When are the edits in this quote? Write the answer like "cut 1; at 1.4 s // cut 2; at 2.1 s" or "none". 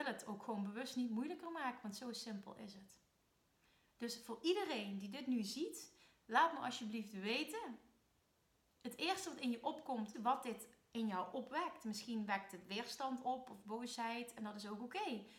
cut 1; at 10.1 s